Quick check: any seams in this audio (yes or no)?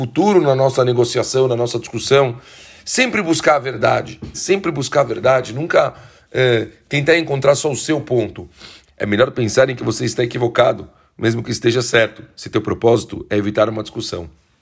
yes